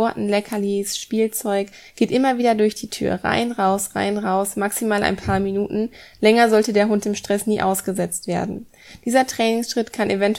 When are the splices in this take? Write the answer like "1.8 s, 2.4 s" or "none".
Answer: none